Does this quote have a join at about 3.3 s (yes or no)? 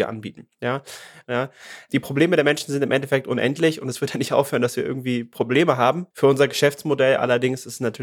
no